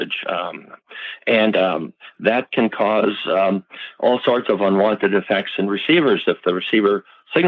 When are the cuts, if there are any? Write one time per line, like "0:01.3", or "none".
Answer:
none